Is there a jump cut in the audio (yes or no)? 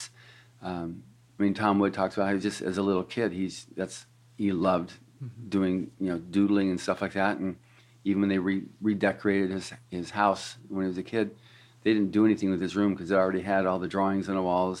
no